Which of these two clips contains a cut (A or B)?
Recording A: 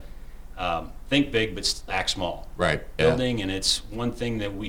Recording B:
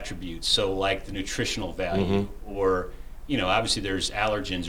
A